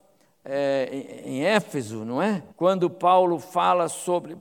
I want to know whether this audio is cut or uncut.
cut